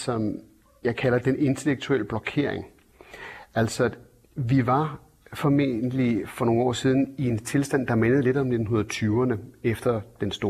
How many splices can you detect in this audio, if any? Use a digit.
0